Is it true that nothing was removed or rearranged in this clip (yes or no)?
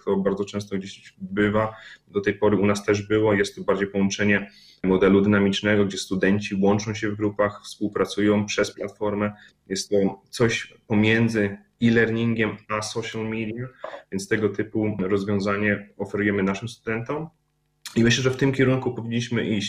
yes